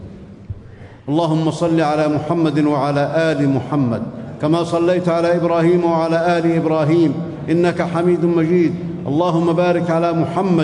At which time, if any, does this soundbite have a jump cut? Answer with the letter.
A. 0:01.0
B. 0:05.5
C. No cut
A